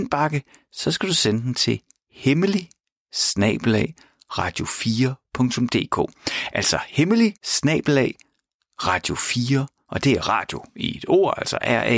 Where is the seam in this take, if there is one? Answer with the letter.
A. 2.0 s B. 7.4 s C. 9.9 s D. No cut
B